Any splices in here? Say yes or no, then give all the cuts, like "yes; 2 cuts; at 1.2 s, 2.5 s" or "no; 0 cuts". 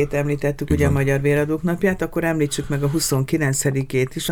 no; 0 cuts